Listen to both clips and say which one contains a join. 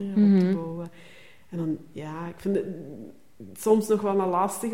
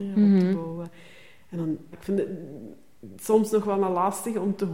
second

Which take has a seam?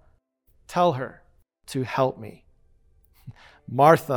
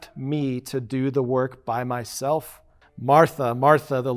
second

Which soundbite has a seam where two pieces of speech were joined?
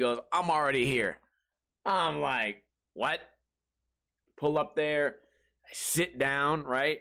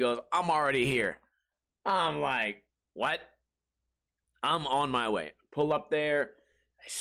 first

